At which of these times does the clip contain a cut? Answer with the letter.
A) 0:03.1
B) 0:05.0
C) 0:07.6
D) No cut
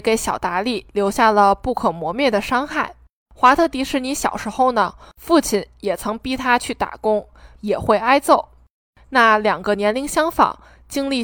C